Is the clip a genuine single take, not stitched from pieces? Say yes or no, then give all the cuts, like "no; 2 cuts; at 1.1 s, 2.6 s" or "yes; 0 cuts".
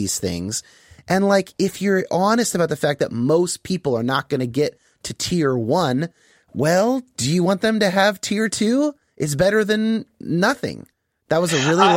yes; 0 cuts